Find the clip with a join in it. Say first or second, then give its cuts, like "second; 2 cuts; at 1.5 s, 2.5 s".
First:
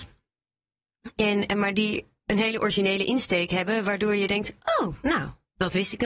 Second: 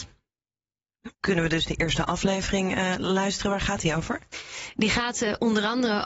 second; 1 cut; at 1.1 s